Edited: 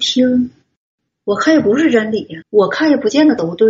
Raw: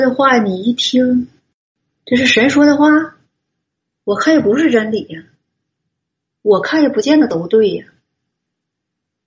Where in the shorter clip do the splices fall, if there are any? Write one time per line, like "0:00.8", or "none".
0:01.1
0:02.4